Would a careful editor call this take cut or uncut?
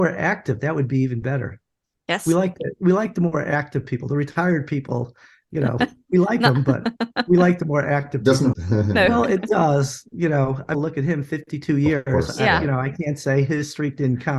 cut